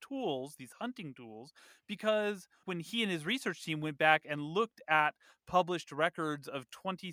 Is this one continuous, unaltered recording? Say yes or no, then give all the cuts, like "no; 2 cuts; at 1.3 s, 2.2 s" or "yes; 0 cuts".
yes; 0 cuts